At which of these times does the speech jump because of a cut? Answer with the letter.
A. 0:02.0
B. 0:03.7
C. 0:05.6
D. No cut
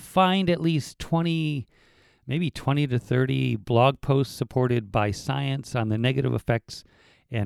D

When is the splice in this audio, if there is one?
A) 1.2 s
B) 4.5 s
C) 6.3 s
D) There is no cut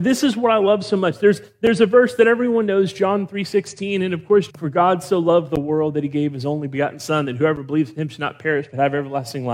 B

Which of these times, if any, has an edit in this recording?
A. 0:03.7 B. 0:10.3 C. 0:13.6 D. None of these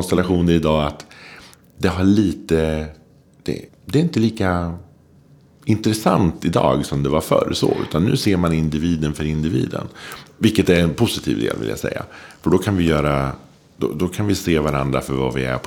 A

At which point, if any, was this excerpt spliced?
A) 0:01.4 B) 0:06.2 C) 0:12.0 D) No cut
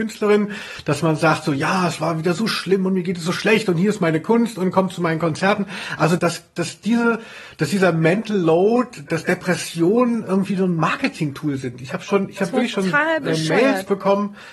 B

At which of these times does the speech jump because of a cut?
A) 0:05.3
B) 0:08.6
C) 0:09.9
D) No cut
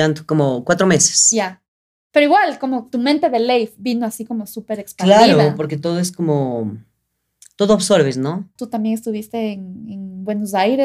B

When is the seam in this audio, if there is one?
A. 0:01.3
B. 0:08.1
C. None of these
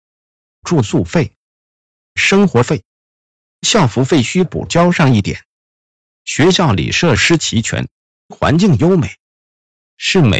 B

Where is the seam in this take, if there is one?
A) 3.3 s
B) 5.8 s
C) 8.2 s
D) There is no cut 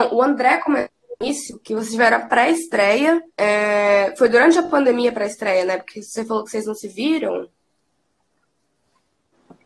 A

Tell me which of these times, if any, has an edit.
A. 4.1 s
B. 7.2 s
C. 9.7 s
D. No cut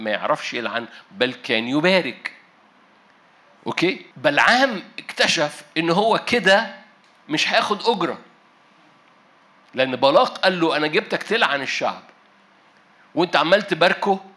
A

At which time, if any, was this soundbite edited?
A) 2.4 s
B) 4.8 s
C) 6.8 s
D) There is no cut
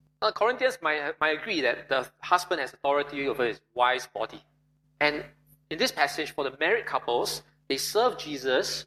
B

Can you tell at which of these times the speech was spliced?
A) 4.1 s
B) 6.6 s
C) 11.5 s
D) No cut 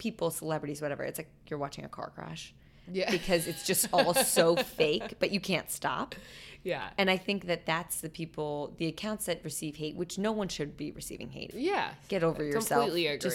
C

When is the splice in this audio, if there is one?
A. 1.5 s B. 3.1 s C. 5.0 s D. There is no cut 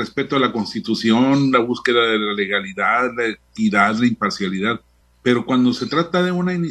C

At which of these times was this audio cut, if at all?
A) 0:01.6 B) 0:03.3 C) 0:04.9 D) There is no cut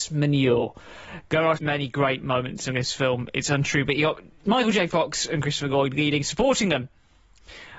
A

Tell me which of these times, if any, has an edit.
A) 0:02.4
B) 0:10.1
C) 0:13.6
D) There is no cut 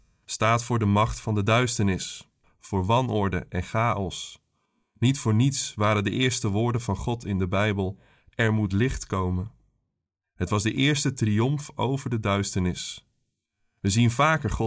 A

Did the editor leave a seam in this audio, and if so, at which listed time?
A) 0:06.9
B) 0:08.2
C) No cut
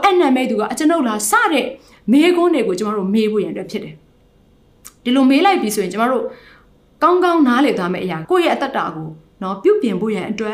B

